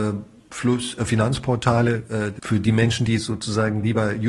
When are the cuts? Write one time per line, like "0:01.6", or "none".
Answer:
0:02.4